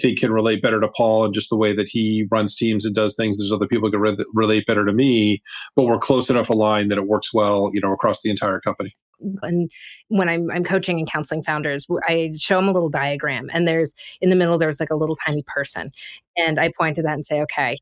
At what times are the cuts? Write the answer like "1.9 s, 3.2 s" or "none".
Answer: 9.4 s